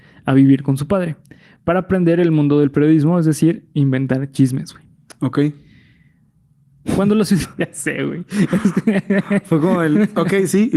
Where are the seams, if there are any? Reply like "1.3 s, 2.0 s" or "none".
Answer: 7.4 s